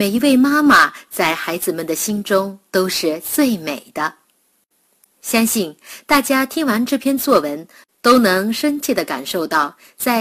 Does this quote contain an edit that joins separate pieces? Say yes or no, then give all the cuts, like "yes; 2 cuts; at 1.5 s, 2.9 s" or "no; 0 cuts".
no; 0 cuts